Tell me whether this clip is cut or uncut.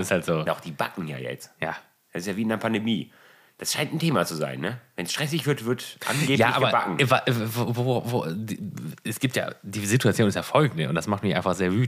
uncut